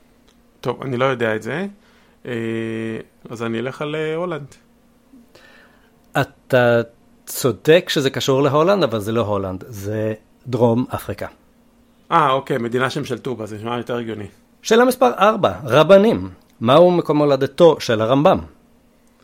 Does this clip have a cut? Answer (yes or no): yes